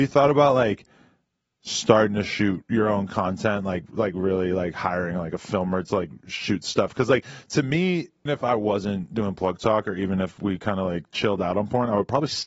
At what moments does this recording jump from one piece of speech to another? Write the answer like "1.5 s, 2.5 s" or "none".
8.3 s